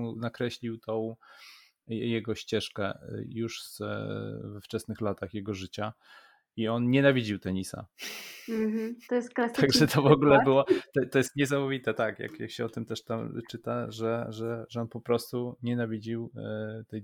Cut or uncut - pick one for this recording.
uncut